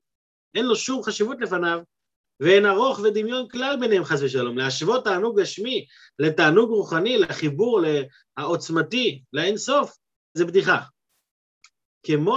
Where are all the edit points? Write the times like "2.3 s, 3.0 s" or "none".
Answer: 10.4 s